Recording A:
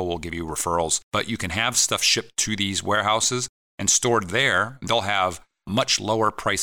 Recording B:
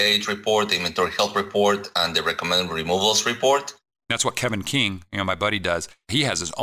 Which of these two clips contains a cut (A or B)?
B